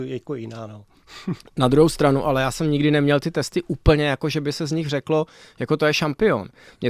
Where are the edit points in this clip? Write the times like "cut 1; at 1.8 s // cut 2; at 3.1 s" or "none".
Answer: none